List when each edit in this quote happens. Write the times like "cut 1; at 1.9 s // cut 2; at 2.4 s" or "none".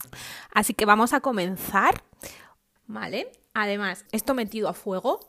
cut 1; at 2.8 s // cut 2; at 4.1 s